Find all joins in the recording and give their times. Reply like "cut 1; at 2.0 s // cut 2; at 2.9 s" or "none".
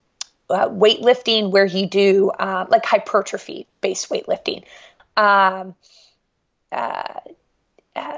cut 1; at 5.0 s